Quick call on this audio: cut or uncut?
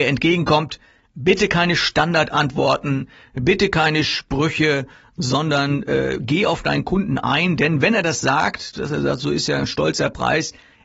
uncut